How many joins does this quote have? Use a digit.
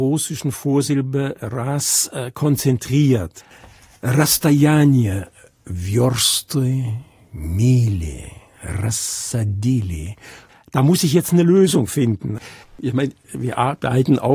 2